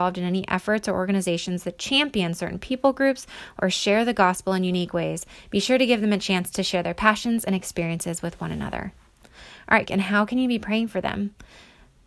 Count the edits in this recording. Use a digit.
1